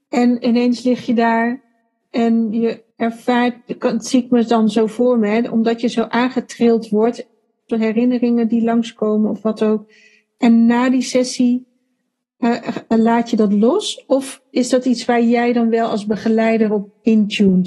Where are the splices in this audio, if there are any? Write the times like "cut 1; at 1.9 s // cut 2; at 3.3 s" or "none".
cut 1; at 2.9 s // cut 2; at 7.7 s